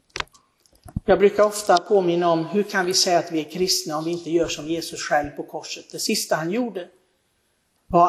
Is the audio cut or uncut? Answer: uncut